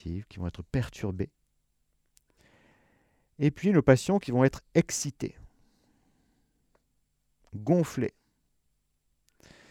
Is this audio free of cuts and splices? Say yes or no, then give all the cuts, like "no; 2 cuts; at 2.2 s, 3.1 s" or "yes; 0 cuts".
yes; 0 cuts